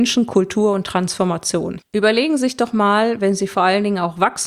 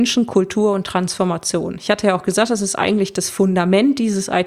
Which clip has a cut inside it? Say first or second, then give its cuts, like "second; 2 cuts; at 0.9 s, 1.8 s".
first; 1 cut; at 1.8 s